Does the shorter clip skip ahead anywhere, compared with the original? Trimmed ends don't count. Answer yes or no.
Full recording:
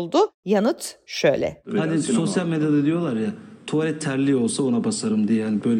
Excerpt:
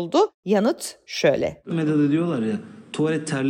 yes